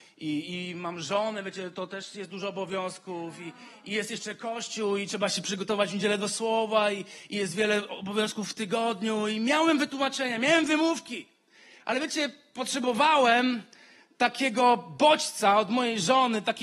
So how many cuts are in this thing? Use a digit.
0